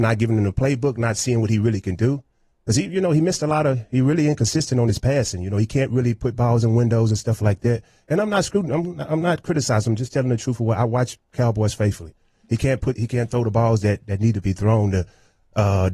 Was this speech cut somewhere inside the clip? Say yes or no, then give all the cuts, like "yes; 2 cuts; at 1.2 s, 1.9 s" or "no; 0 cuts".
no; 0 cuts